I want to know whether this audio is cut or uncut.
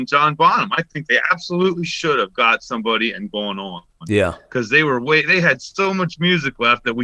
uncut